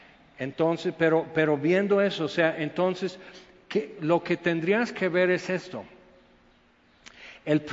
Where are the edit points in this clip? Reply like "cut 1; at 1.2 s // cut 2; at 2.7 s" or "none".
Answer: none